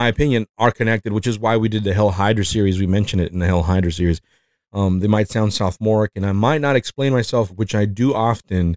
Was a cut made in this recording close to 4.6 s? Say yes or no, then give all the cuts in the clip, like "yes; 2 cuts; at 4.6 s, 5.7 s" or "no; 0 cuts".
yes; 2 cuts; at 4.6 s, 7.5 s